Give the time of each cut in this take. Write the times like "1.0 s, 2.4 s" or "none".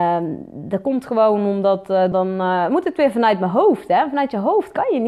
2.1 s